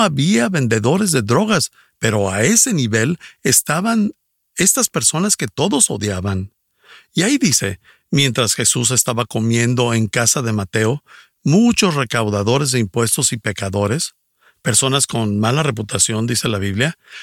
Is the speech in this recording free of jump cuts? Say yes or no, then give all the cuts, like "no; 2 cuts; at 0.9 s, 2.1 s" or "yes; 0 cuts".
yes; 0 cuts